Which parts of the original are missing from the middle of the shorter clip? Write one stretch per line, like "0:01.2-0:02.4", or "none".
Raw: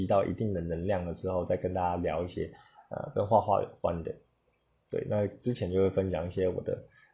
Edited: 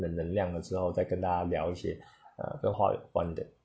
0:03.3-0:03.4